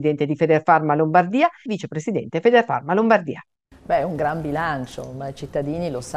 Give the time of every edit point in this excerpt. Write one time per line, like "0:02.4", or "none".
0:01.7